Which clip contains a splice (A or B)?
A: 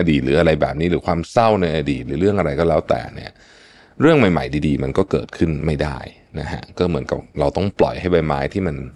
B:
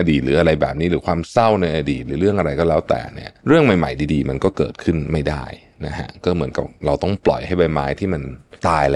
B